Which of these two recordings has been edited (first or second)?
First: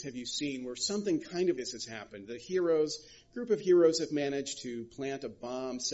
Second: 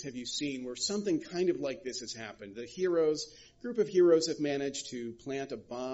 first